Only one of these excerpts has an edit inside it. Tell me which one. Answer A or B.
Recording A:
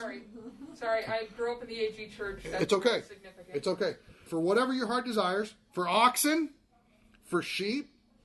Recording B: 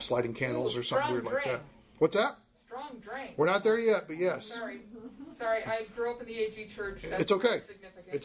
A